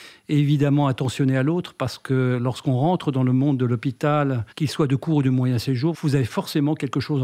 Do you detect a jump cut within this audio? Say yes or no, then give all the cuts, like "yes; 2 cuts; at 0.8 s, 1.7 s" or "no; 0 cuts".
yes; 2 cuts; at 4.5 s, 5.9 s